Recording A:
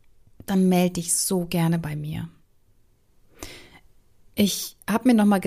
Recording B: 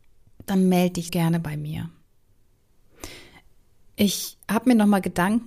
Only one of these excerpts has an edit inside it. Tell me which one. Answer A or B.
B